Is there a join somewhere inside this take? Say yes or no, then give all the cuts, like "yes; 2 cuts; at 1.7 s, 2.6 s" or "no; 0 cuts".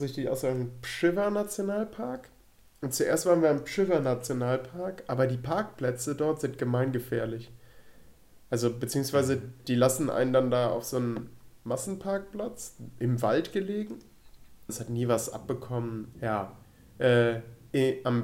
yes; 2 cuts; at 14.7 s, 16.1 s